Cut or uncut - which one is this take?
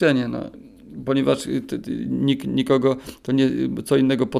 uncut